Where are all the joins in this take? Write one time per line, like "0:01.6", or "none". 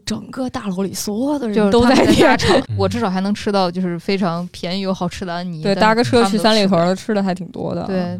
0:02.6